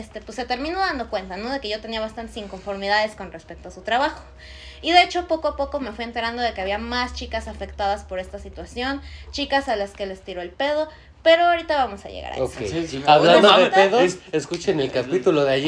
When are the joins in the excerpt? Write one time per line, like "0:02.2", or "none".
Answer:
0:12.9